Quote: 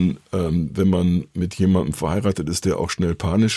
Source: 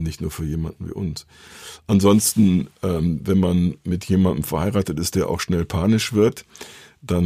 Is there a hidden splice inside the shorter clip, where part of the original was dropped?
no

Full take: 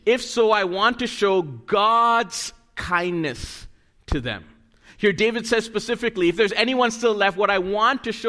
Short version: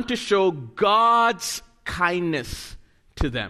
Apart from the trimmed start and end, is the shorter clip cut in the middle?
no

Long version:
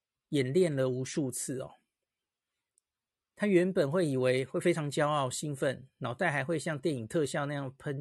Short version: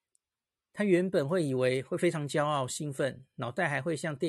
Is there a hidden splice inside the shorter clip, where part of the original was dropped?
no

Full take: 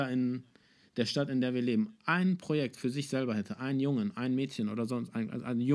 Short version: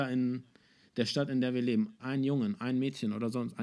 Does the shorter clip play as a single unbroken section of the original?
no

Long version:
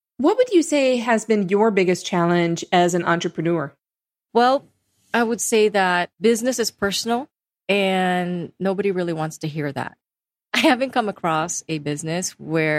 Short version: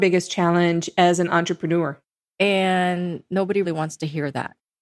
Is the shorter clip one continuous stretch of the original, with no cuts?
no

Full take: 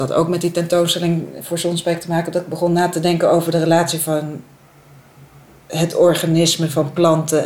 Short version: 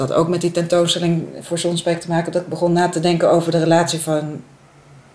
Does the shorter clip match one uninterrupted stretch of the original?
yes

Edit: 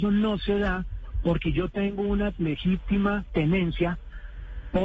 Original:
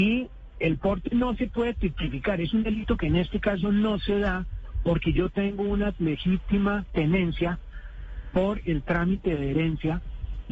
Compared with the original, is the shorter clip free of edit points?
yes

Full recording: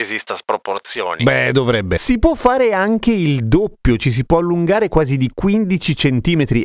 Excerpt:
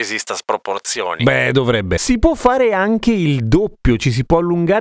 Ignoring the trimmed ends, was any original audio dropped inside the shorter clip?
no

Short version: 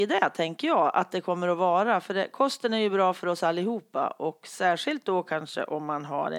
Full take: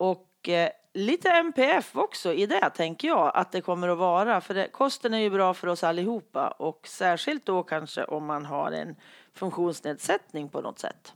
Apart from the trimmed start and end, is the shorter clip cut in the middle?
no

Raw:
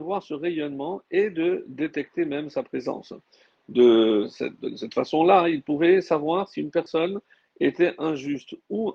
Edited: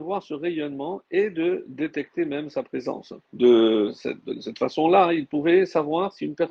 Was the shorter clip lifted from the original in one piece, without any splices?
no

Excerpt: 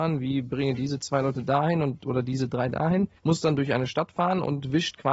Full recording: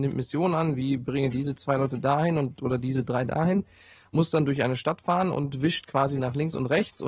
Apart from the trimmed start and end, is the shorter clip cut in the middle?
yes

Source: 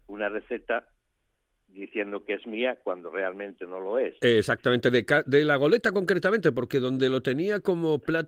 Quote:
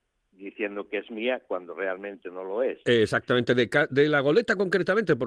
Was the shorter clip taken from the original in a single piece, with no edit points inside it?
yes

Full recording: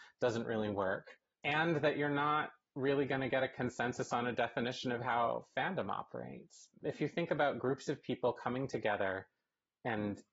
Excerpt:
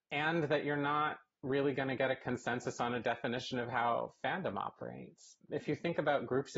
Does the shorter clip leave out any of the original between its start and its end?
no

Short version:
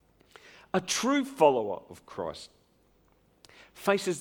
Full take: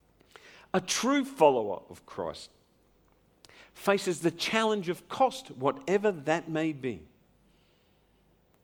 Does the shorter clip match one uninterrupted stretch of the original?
yes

